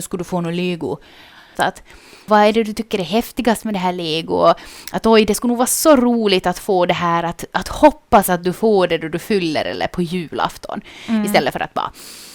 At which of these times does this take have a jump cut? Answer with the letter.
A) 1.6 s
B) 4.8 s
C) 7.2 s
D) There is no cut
A